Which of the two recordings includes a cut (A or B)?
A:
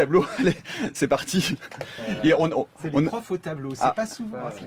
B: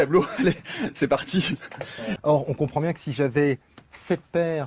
B